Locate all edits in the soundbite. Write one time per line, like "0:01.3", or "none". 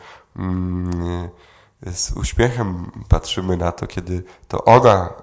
none